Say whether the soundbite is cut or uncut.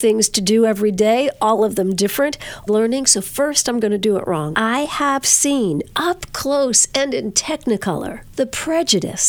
cut